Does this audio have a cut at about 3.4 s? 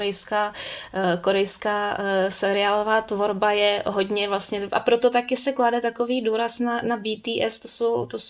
no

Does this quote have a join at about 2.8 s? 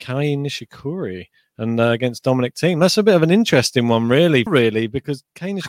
no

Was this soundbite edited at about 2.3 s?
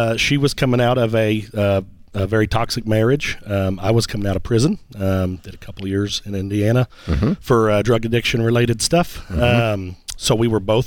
no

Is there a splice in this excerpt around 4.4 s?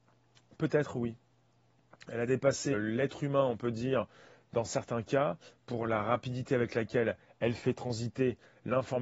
no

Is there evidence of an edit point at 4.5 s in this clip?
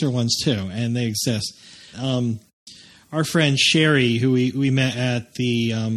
no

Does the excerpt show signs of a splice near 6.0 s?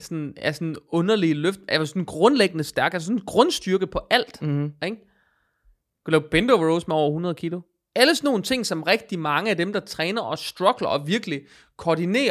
no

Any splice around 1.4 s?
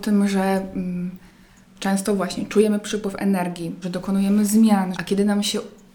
no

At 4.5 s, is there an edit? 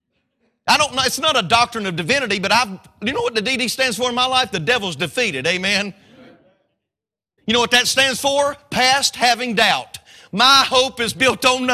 no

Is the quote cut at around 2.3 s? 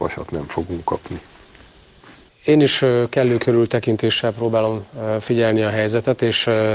yes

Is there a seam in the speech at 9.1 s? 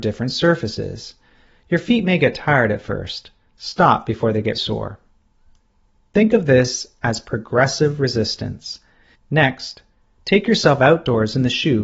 yes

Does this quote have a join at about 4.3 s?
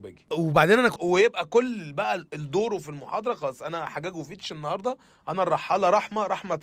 no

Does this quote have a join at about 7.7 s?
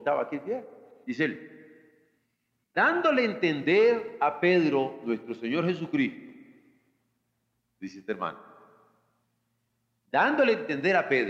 no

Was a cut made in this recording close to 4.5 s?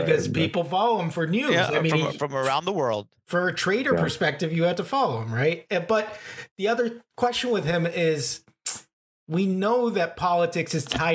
no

